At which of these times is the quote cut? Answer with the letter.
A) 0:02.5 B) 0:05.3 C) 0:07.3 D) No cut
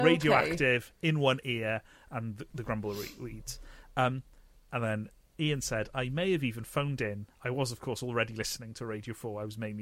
C